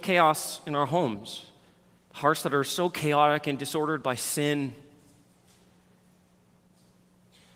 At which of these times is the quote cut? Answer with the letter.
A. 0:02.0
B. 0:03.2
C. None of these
A